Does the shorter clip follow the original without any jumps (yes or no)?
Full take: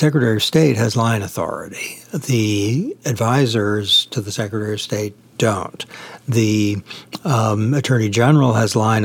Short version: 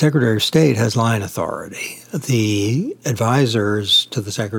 yes